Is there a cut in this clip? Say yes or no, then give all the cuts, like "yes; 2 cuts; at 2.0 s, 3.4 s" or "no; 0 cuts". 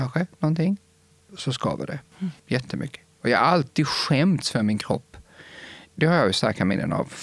no; 0 cuts